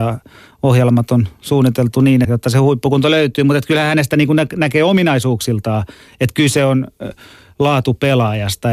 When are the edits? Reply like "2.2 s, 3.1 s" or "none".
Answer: 2.2 s

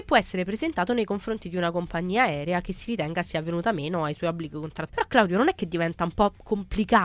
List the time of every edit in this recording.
4.9 s

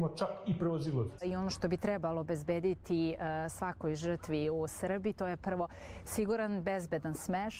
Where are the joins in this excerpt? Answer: 1.2 s

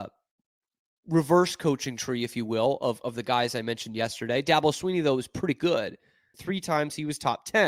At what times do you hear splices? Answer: 6.3 s

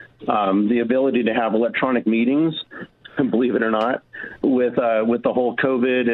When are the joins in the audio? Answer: 4.4 s

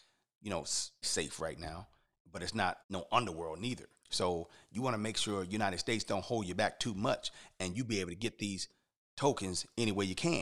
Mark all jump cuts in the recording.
1.0 s, 2.8 s, 4.0 s

